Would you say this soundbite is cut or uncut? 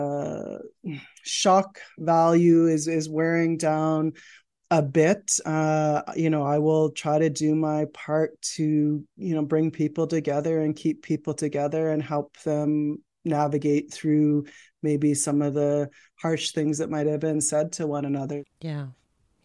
uncut